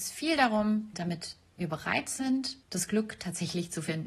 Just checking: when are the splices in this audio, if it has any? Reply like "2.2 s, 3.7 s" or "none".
0.9 s, 2.6 s